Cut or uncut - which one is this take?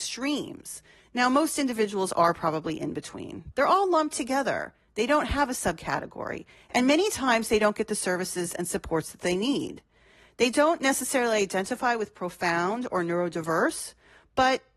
cut